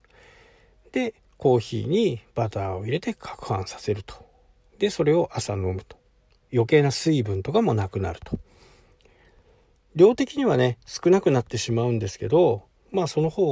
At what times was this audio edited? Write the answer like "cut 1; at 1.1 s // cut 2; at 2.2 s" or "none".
cut 1; at 6.5 s